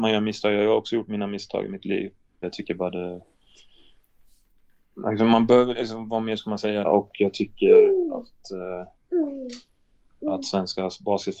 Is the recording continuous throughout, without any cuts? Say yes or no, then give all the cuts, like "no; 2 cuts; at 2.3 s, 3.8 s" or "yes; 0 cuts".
no; 2 cuts; at 2.4 s, 6.8 s